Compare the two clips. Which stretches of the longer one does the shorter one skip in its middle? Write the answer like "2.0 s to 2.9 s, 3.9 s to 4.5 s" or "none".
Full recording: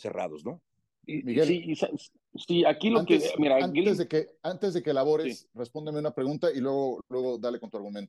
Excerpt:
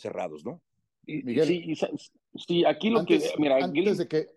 none

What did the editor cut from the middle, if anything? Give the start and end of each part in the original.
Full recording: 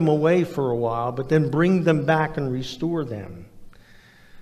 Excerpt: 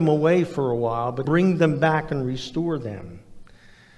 1.2 s to 1.5 s

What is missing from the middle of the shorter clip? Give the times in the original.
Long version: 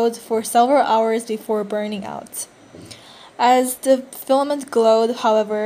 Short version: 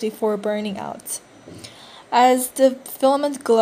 none

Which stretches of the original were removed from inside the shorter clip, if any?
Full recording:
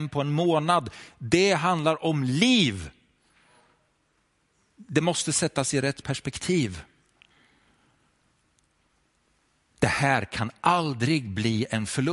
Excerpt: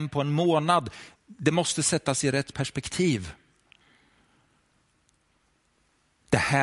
1.1 s to 4.6 s

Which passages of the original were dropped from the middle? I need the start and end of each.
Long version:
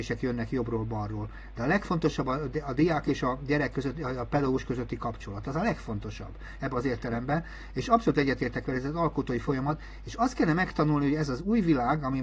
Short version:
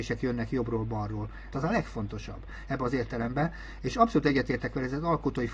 1.5 s to 5.4 s

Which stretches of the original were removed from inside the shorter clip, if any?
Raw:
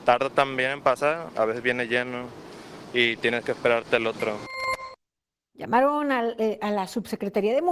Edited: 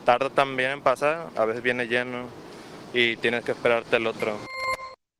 none

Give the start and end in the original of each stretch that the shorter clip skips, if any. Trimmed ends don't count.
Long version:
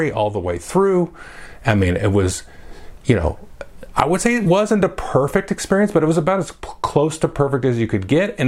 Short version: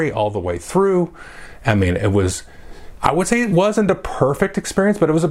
3.0 s to 3.9 s

